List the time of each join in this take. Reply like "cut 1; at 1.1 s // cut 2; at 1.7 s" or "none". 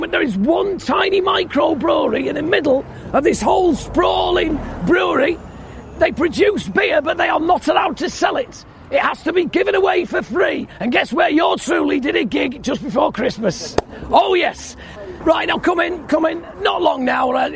none